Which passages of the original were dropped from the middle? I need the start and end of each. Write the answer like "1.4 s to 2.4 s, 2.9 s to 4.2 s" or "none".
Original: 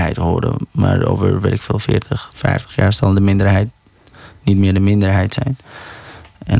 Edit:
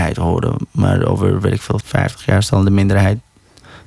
1.8 s to 2.3 s